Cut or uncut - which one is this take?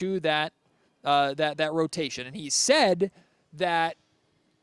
uncut